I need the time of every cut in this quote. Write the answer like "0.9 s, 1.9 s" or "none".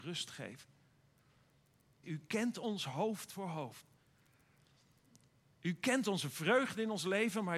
2.0 s